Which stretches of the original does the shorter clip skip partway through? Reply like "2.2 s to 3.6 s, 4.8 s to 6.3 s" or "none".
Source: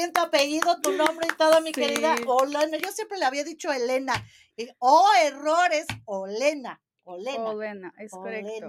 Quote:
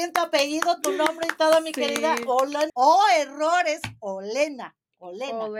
2.7 s to 4.8 s